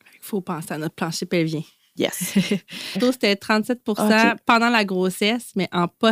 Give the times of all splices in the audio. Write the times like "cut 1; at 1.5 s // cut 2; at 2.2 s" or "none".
cut 1; at 3.0 s